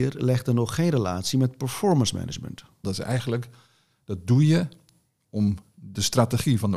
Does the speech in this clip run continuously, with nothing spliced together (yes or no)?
no